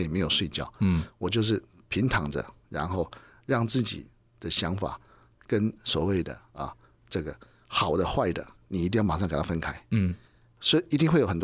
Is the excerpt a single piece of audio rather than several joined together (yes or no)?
yes